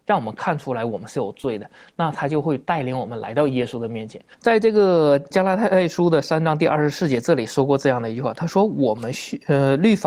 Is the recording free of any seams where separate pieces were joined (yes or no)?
no